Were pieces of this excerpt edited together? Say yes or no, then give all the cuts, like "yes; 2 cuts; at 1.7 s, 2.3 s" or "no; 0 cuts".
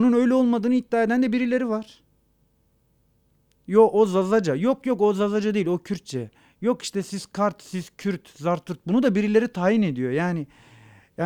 no; 0 cuts